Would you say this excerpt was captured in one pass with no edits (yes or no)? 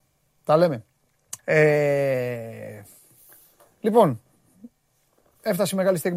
no